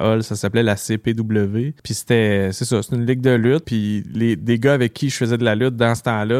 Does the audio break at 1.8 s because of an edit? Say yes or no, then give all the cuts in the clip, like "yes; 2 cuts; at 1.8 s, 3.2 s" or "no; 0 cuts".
yes; 2 cuts; at 1.8 s, 3.6 s